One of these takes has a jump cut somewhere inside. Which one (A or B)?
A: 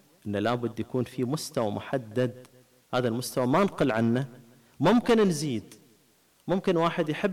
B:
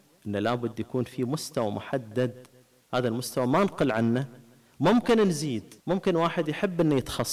B